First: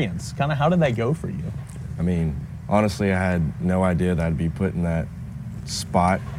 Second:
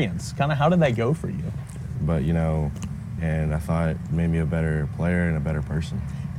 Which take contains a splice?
second; 2 cuts; at 2.0 s, 3.2 s

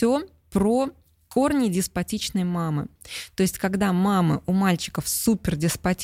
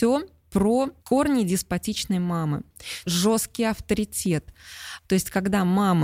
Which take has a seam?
second; 3 cuts; at 1.0 s, 3.0 s, 5.0 s

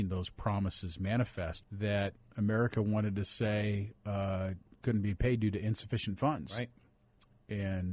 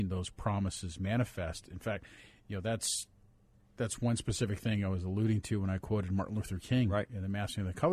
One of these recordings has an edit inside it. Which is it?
first; 1 cut; at 1.6 s

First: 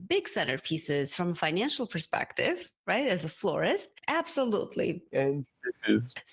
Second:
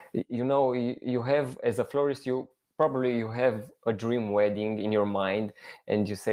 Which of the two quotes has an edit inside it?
first; 1 cut; at 5.1 s

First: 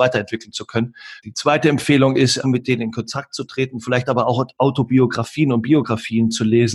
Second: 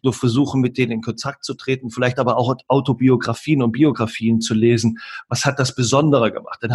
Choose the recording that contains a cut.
first; 2 cuts; at 1.2 s, 2.4 s

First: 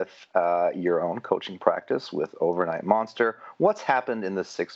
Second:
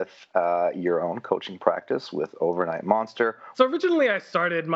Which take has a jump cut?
second; 1 cut; at 3.5 s

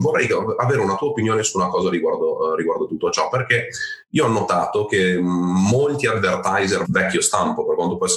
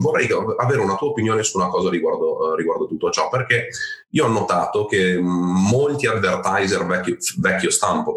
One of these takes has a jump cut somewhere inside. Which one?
first; 1 cut; at 6.8 s

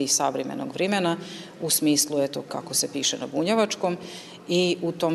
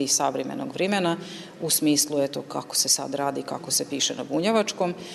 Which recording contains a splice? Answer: first; 1 cut; at 2.5 s

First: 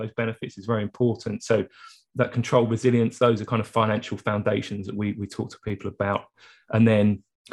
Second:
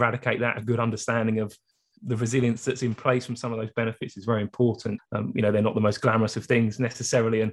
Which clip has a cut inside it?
second; 1 cut; at 5.0 s

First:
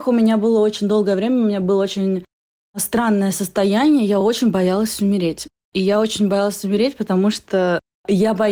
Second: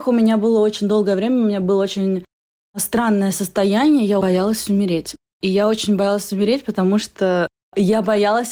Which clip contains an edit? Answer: second; 1 cut; at 4.2 s

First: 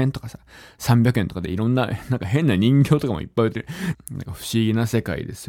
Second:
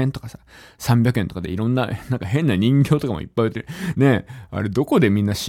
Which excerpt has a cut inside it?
first; 1 cut; at 3.9 s

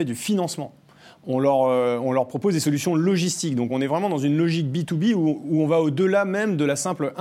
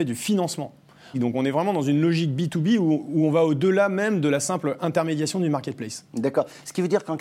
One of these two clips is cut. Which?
second; 1 cut; at 1.1 s

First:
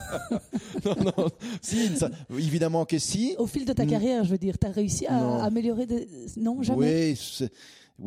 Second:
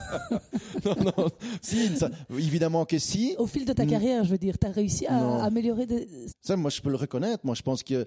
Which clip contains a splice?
second; 1 cut; at 6.3 s

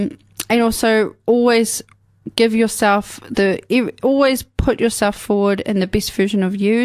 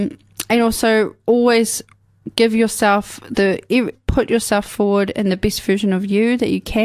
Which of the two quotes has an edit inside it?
second; 1 cut; at 3.9 s

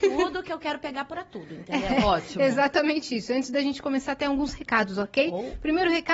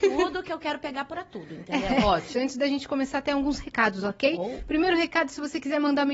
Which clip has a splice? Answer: second; 1 cut; at 2.3 s

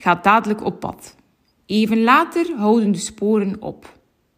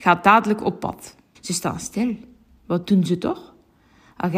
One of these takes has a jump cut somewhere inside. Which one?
second; 1 cut; at 1.3 s

